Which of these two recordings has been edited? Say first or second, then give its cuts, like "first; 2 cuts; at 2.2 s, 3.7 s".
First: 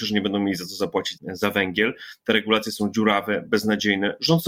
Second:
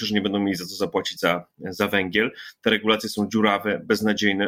first; 1 cut; at 1.2 s